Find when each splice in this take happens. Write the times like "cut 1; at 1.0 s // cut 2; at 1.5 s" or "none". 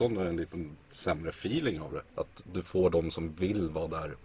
cut 1; at 2.1 s